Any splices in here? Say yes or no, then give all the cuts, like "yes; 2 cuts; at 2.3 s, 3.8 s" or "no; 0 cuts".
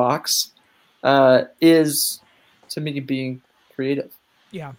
no; 0 cuts